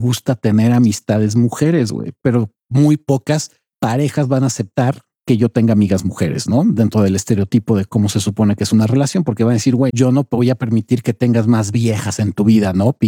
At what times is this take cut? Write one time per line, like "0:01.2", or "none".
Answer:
0:09.9